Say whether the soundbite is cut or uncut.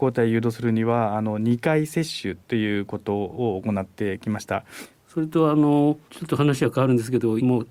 cut